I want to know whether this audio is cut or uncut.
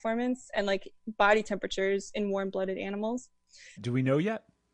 cut